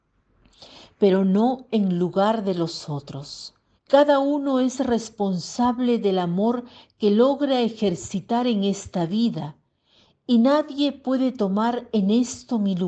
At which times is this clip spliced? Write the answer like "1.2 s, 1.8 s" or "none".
3.8 s